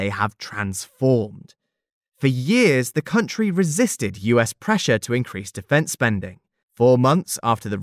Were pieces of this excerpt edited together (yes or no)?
no